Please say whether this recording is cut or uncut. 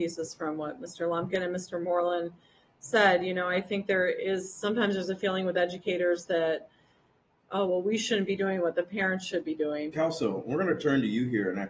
cut